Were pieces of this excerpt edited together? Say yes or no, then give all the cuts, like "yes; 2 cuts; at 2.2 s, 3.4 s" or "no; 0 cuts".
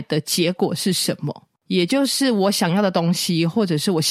no; 0 cuts